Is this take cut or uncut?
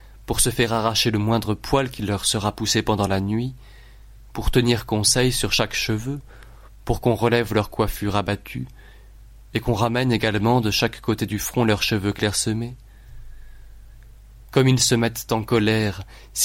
uncut